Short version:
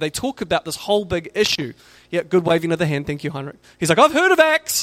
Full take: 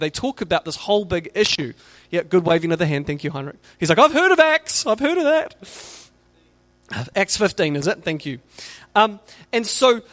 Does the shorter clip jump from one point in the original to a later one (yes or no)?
no